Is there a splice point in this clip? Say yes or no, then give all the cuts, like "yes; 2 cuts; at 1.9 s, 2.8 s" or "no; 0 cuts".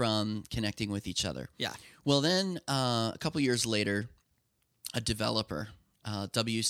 no; 0 cuts